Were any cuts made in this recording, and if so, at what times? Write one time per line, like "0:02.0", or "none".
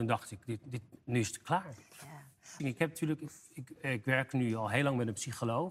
0:02.6
0:03.8